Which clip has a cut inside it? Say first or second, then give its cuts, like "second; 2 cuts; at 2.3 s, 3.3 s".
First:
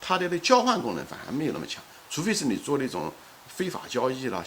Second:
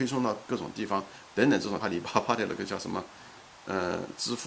second; 1 cut; at 1.8 s